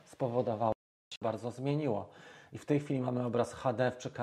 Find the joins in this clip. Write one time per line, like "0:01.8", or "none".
0:01.2